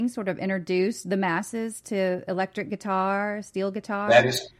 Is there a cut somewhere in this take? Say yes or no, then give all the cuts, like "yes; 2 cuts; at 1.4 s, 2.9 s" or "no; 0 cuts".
no; 0 cuts